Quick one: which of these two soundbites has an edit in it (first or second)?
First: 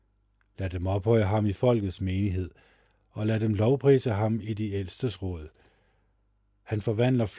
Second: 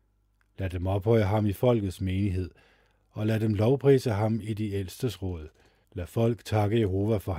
second